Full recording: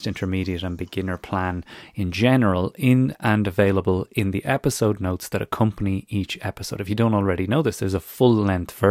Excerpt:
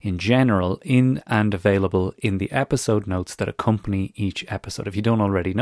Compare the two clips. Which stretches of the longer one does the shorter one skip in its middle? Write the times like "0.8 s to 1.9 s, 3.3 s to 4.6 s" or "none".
none

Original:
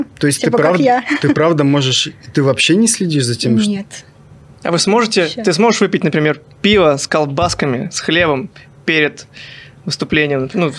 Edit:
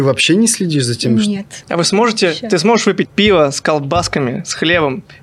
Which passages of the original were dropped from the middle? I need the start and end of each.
4.0 s to 4.6 s, 6.0 s to 6.5 s

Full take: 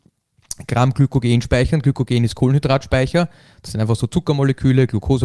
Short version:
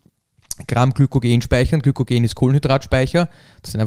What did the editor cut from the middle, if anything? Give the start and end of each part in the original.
none

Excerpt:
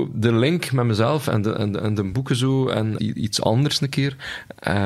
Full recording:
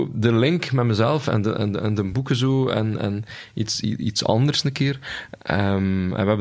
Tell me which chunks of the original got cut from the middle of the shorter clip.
3.0 s to 3.8 s

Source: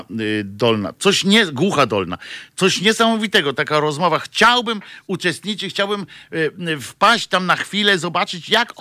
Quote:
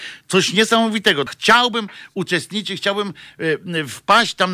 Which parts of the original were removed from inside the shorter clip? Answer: 3.5 s to 4.2 s

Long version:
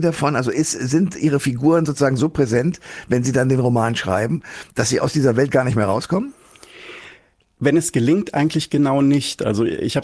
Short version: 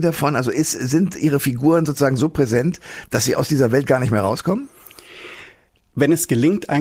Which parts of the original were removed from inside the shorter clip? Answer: 3.0 s to 4.7 s

